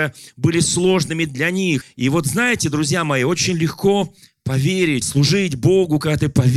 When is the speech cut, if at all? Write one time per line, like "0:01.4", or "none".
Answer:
0:01.8
0:05.0

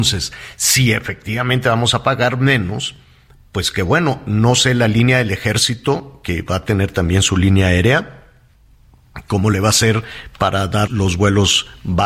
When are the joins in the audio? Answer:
0:10.9

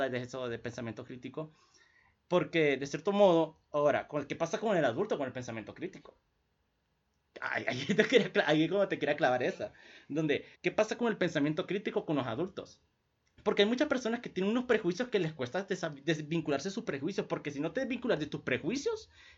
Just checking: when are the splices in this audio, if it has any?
0:10.5

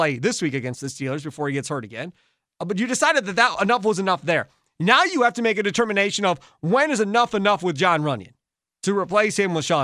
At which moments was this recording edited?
none

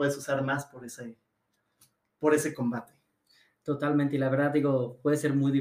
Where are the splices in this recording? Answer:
none

